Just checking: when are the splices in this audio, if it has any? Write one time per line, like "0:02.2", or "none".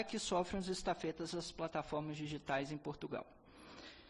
none